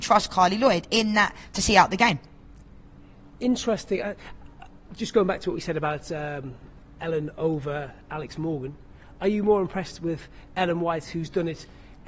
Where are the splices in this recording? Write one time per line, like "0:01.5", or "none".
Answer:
none